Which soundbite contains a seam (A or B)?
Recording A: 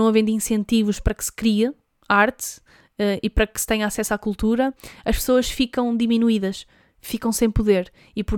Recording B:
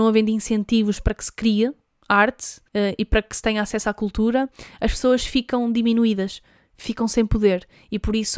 B